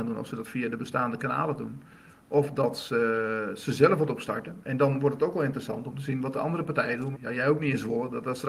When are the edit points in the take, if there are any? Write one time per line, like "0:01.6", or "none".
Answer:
0:07.1

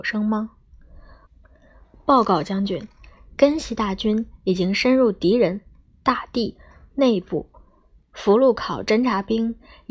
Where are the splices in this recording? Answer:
none

